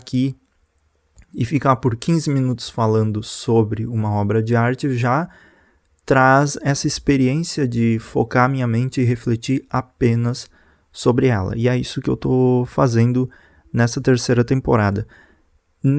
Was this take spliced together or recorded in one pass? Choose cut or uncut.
uncut